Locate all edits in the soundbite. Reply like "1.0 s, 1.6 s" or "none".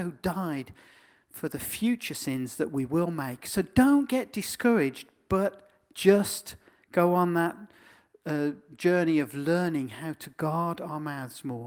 none